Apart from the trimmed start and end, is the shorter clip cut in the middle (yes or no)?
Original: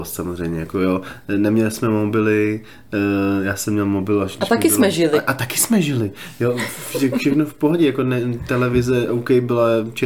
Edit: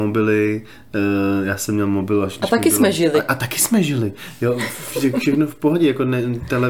no